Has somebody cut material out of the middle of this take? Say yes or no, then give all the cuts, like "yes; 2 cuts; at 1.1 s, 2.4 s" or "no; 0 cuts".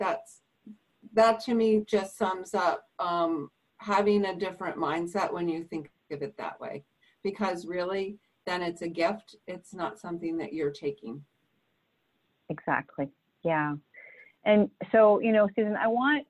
no; 0 cuts